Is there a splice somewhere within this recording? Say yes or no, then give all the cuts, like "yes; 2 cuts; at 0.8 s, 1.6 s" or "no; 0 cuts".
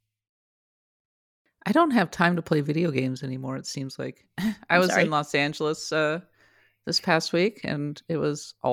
no; 0 cuts